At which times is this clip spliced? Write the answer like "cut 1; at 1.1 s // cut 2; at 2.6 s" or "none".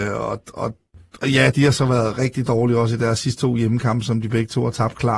none